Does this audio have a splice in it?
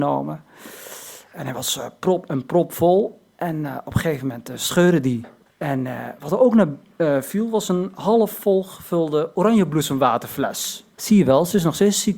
yes; 2 cuts; at 5.5 s, 11.0 s

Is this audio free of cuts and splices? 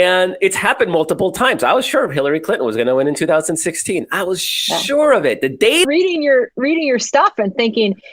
no; 1 cut; at 5.8 s

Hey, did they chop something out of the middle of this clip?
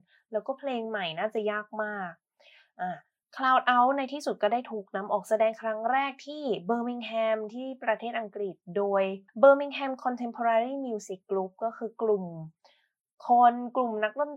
yes; 1 cut; at 9.3 s

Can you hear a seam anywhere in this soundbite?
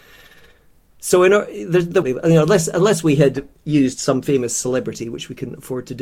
yes; 1 cut; at 2.0 s

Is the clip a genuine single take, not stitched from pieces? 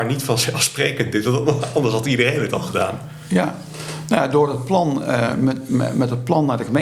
yes; 0 cuts

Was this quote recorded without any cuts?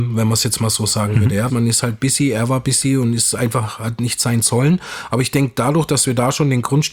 no; 1 cut; at 1.5 s

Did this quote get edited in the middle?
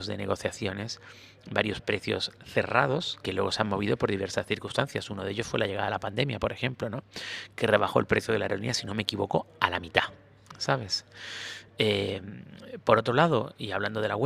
no; 0 cuts

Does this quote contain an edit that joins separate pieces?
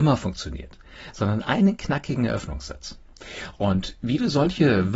no; 0 cuts

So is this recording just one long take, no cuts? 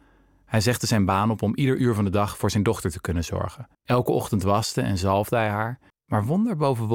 no; 2 cuts; at 3.7 s, 5.9 s

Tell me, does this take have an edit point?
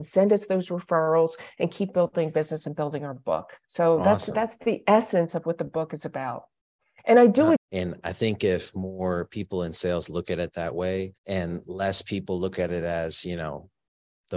yes; 3 cuts; at 3.6 s, 7.6 s, 11.2 s

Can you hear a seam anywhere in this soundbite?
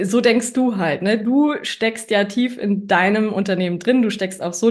no; 0 cuts

